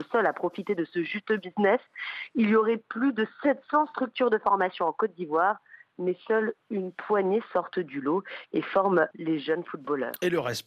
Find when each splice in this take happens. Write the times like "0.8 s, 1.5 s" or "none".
9.1 s